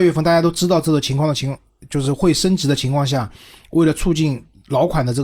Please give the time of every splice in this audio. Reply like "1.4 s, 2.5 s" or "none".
none